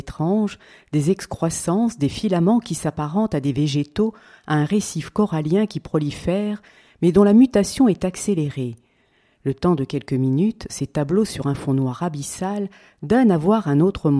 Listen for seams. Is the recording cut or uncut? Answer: uncut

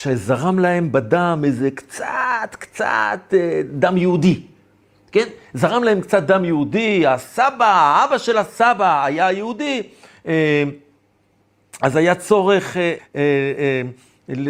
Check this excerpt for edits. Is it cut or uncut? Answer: cut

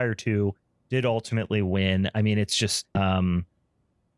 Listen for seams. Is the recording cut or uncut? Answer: cut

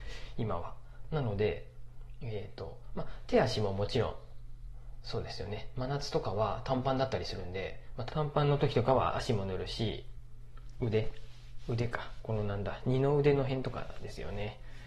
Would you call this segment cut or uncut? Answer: cut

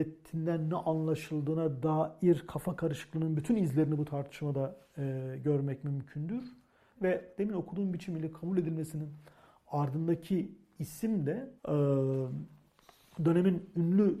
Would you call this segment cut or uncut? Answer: cut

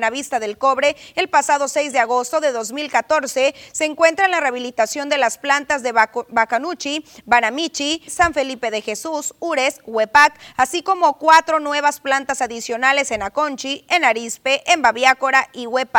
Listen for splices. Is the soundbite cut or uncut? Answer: cut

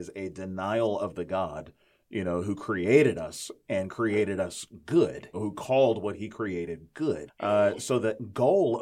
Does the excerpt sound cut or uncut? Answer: cut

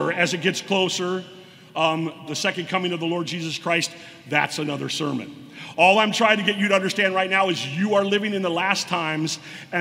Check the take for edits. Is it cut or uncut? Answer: cut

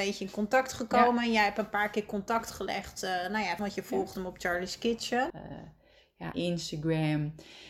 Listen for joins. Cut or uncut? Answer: cut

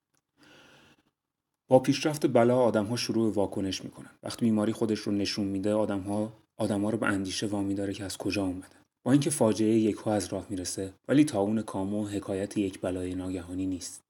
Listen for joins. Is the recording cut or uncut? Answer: cut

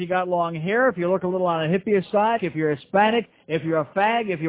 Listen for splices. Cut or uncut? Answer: cut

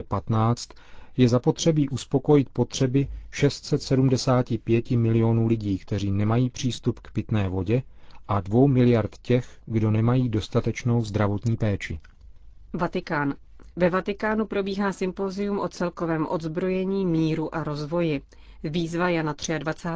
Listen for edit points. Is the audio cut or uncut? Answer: uncut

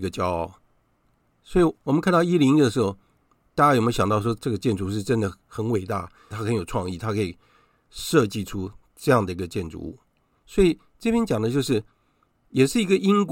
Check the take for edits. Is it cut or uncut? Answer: uncut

